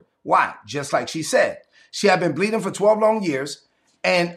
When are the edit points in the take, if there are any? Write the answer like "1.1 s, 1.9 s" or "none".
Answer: none